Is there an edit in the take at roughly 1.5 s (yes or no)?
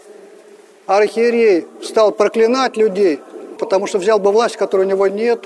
no